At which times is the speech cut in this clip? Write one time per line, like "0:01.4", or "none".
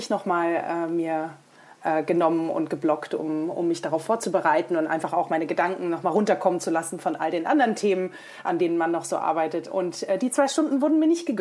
none